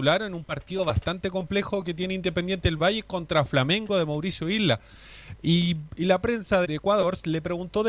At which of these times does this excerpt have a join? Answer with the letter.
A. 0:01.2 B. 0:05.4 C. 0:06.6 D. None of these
C